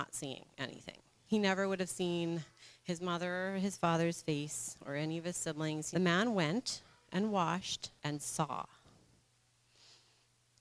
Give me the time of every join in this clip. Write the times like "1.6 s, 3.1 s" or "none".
1.3 s, 5.9 s, 8.0 s